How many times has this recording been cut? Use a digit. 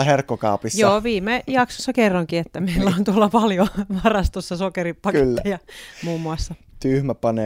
0